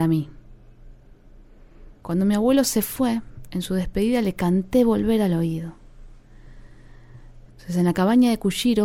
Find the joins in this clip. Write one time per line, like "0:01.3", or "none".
0:02.0
0:07.5

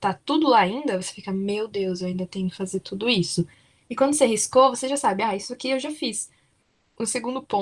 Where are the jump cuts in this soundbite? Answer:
none

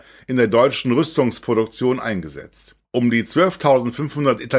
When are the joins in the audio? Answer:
0:02.8

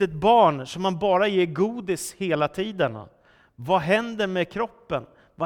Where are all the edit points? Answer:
none

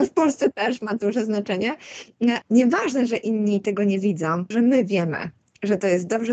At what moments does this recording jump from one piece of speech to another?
0:02.4
0:04.5

